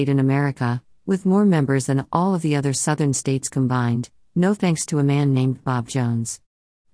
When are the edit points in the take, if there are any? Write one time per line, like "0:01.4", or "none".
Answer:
none